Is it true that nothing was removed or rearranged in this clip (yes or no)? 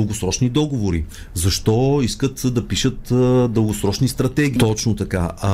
no